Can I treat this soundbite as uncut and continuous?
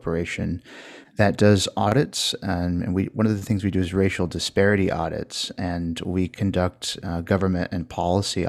yes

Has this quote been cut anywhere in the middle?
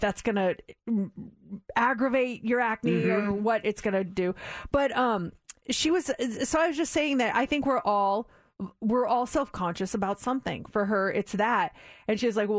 no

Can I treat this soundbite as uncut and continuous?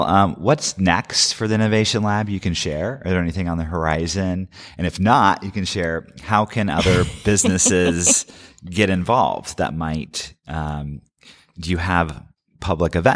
yes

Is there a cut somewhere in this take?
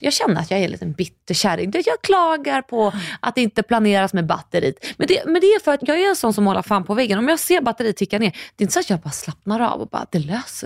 yes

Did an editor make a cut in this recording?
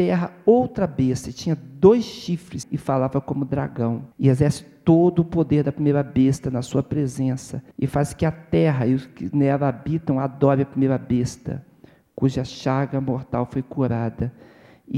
yes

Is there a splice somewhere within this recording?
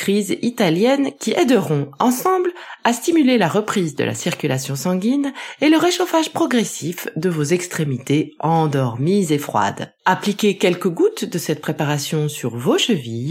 yes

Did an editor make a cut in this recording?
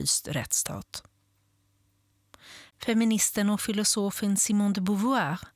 yes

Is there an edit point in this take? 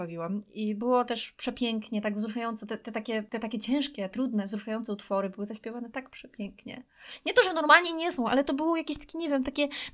no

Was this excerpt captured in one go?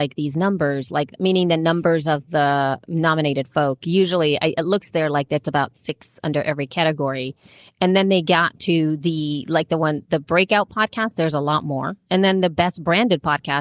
yes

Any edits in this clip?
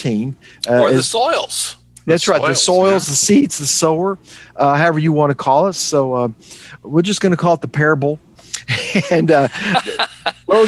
no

